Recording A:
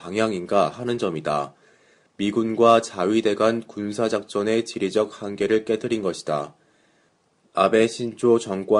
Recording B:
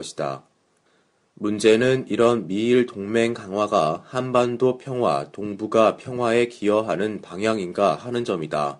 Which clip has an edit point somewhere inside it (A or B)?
A